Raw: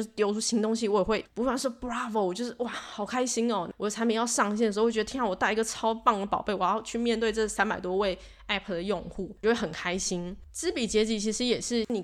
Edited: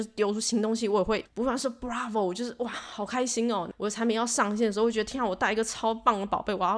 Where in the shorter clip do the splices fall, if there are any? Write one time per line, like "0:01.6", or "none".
none